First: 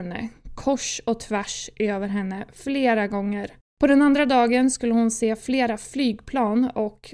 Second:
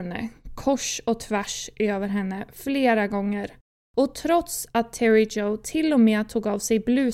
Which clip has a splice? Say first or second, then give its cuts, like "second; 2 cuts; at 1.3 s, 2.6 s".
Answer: first; 1 cut; at 3.6 s